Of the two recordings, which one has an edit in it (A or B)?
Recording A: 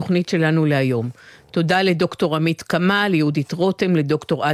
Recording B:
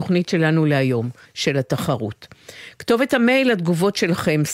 B